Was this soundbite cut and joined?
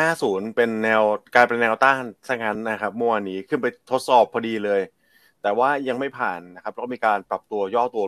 no; 0 cuts

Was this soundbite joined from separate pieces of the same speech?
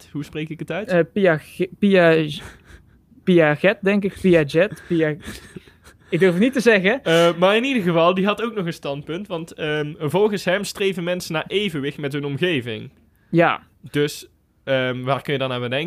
no; 0 cuts

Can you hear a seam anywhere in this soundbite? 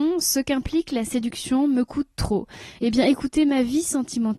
yes; 1 cut; at 2.8 s

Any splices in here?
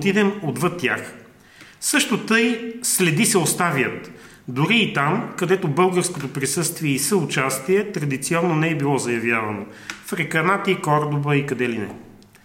no; 0 cuts

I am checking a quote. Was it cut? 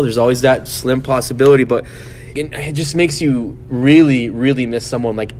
yes; 1 cut; at 2.4 s

